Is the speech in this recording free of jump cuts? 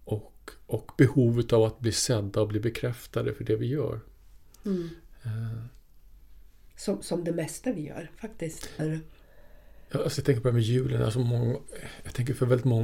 no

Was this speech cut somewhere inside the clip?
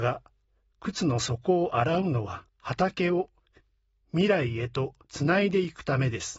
yes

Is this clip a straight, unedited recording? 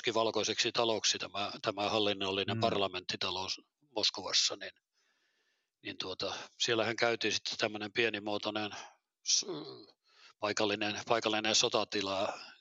yes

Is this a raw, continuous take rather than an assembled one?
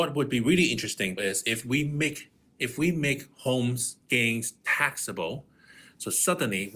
no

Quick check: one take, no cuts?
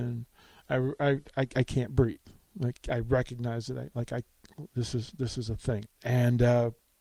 no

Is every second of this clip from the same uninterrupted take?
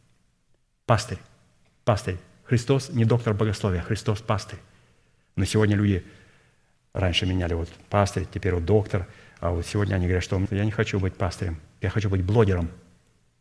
no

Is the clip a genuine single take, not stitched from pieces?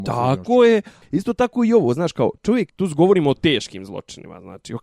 no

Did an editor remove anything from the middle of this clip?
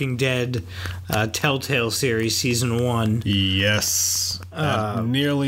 no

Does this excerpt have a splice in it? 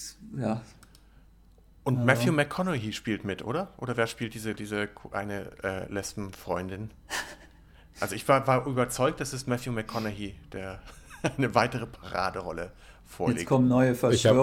no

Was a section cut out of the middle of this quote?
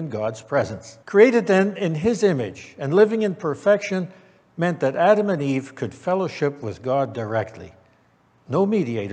yes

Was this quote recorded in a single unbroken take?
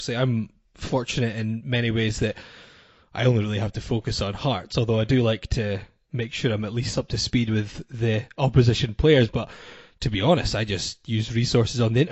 no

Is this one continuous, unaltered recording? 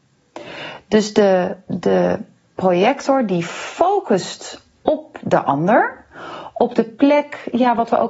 yes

